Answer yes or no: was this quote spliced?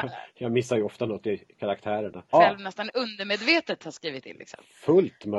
yes